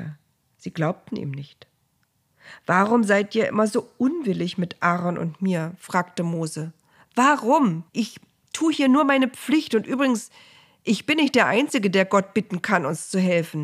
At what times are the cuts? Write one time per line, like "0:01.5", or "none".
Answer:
0:07.9